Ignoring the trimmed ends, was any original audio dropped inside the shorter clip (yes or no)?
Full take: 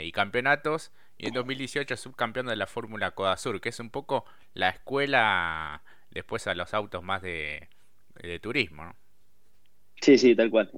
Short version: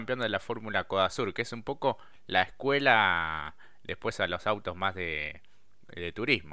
no